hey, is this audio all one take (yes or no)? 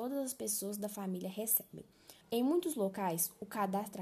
no